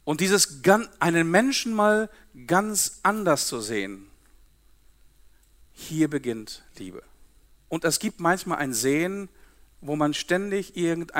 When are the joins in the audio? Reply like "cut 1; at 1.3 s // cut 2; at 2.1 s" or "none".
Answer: cut 1; at 7.7 s